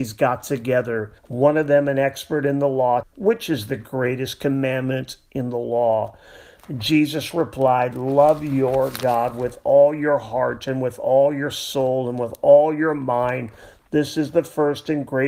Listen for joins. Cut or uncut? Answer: cut